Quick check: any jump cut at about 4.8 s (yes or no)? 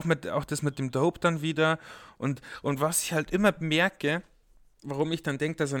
yes